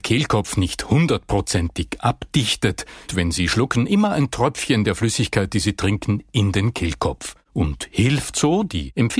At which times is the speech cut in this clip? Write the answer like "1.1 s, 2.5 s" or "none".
3.1 s